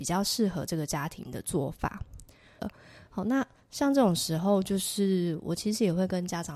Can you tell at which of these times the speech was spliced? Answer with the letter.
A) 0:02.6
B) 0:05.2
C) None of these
A